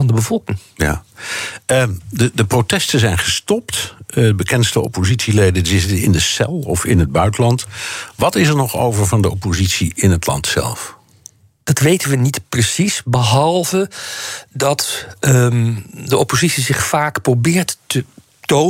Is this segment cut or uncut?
uncut